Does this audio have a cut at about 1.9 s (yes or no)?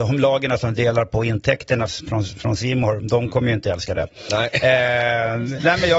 yes